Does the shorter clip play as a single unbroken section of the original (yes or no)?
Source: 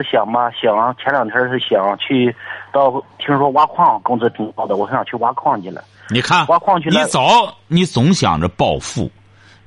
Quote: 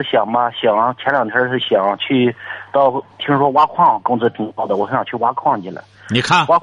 yes